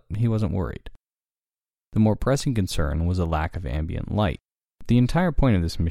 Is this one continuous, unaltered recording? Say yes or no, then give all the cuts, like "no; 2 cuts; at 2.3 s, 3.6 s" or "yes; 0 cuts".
yes; 0 cuts